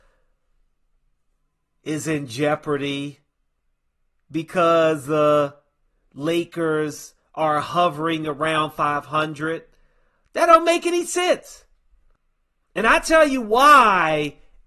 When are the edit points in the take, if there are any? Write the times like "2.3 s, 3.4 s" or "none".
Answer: none